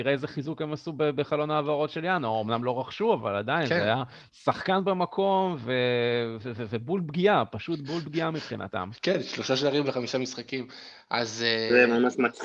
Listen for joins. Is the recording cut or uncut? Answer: uncut